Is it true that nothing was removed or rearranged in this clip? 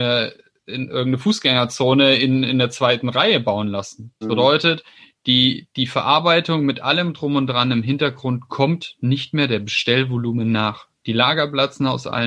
no; 1 cut; at 4.2 s

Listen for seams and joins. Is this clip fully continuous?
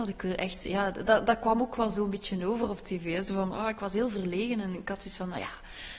yes; 0 cuts

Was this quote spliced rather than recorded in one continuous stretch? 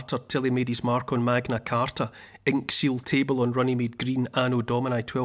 no; 0 cuts

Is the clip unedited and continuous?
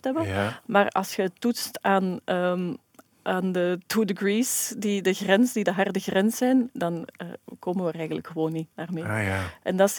no; 1 cut; at 8.7 s

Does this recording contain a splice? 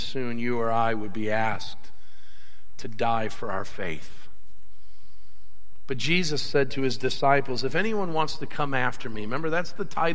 yes; 1 cut; at 9.1 s

